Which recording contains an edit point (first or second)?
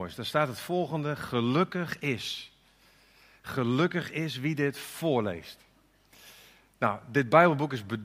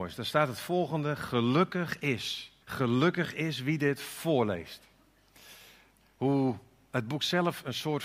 second